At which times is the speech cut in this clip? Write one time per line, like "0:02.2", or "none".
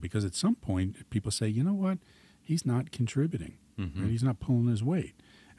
none